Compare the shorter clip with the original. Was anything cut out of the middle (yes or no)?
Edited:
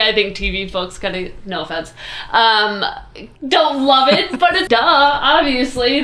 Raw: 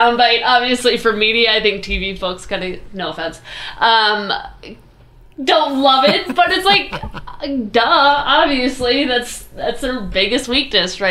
yes